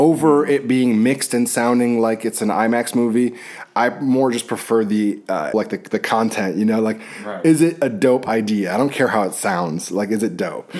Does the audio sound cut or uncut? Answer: cut